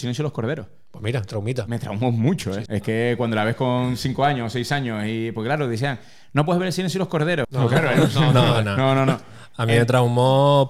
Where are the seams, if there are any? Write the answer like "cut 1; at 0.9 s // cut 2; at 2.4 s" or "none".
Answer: cut 1; at 2.7 s // cut 2; at 7.4 s // cut 3; at 8.6 s